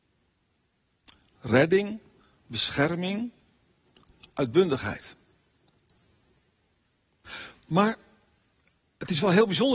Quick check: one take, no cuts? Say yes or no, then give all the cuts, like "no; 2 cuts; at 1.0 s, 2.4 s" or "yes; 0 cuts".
yes; 0 cuts